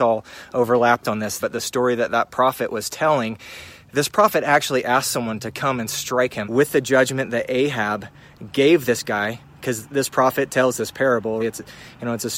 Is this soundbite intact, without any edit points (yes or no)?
no